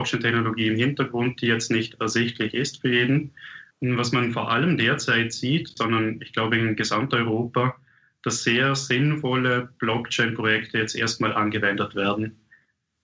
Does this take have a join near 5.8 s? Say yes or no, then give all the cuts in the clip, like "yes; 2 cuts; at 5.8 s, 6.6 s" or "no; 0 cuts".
yes; 2 cuts; at 3.7 s, 5.8 s